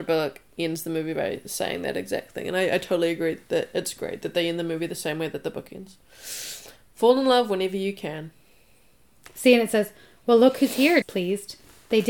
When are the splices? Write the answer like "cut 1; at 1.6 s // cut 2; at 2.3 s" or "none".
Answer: cut 1; at 11.0 s